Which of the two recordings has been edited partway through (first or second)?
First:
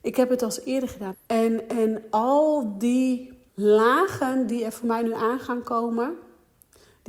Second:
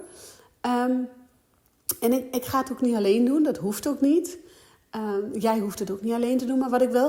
first